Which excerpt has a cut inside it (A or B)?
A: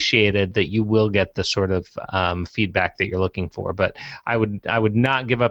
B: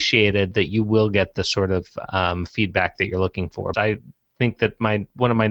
B